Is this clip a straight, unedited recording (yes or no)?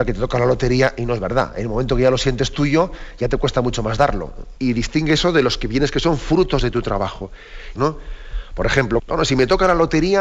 no